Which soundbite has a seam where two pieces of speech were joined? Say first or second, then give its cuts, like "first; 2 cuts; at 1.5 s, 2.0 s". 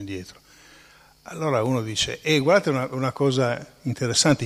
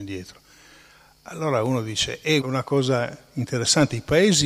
second; 1 cut; at 2.4 s